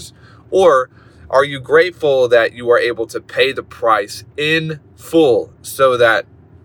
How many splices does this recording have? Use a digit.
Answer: 1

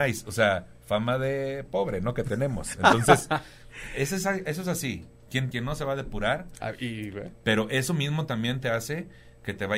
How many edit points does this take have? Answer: 2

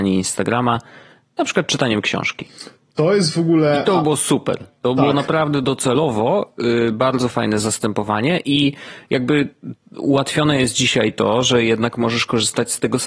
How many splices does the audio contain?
1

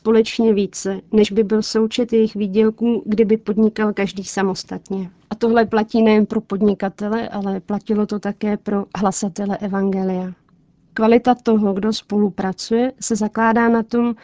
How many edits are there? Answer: 0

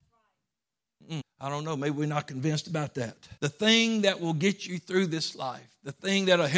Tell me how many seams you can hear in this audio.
2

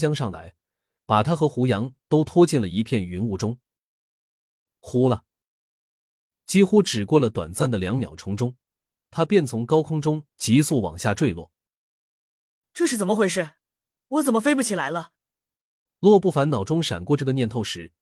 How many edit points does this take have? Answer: 0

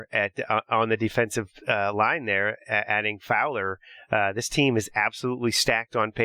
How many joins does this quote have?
0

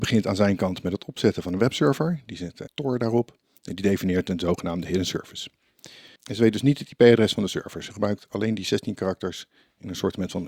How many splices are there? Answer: 2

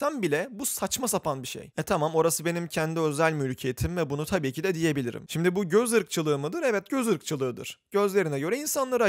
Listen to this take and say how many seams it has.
1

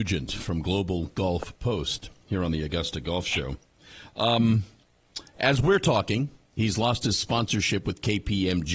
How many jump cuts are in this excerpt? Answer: 0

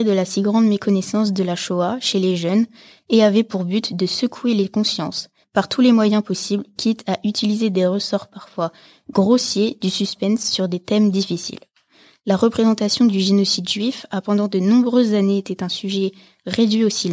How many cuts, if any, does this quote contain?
1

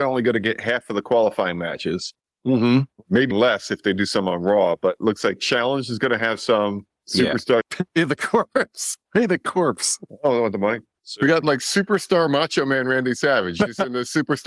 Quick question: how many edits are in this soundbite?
3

